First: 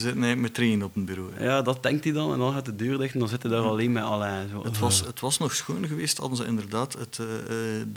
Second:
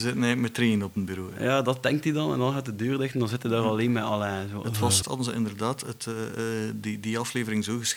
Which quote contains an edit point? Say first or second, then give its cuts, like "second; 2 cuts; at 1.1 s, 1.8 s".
second; 1 cut; at 5.0 s